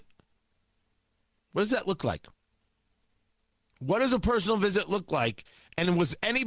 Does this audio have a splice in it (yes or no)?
no